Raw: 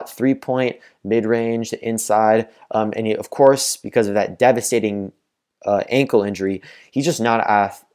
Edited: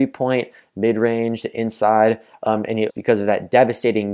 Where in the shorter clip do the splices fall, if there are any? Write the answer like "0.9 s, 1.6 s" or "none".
2.9 s